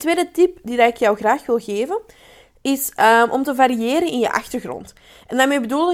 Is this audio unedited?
yes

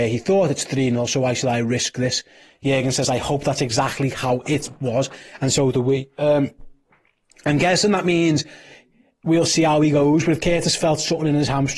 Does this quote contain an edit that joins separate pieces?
no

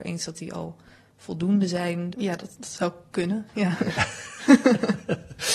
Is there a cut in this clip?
yes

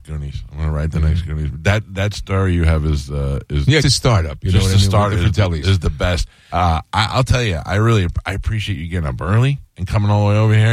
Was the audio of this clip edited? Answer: yes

